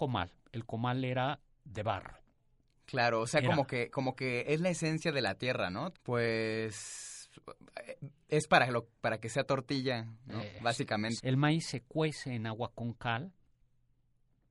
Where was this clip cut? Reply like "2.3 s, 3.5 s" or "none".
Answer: 5.9 s, 11.2 s

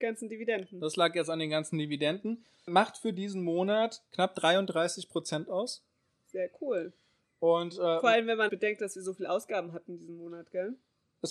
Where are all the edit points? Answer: 8.5 s

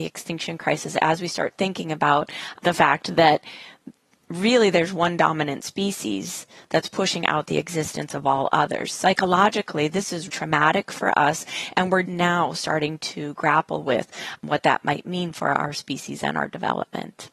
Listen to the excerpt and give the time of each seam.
10.3 s, 12.1 s

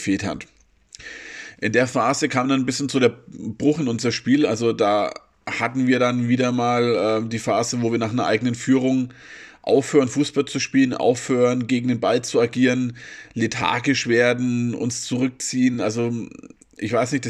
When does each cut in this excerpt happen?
none

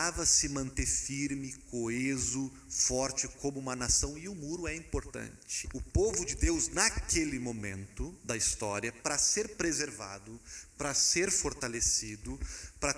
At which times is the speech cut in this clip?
5.6 s

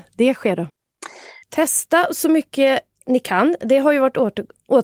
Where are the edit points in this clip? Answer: 1.4 s

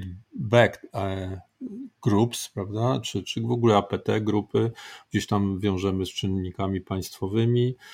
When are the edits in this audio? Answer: none

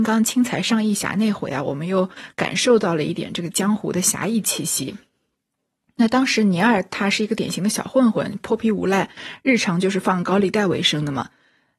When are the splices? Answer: none

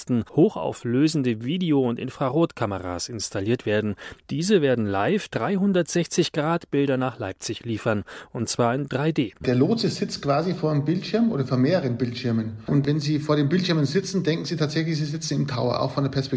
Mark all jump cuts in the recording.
9.4 s, 12.7 s

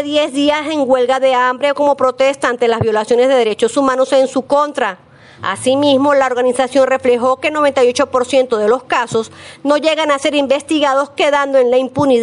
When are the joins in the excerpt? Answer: 5.4 s

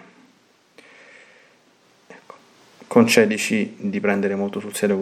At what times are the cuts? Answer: none

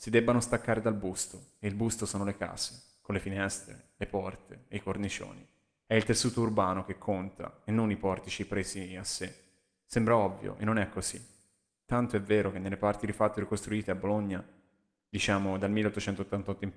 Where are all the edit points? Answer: none

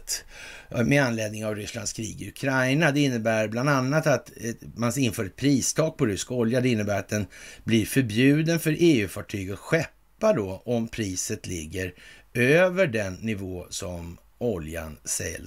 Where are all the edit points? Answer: none

